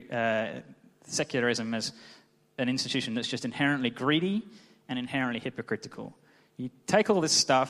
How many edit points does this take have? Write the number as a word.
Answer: zero